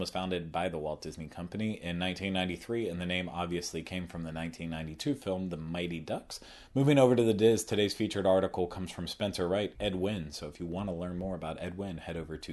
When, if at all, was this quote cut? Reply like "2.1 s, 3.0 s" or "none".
6.7 s, 9.7 s